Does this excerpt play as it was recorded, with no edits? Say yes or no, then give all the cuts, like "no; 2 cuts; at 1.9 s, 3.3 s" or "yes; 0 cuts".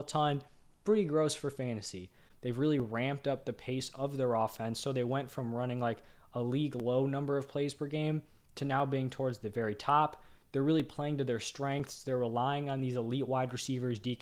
yes; 0 cuts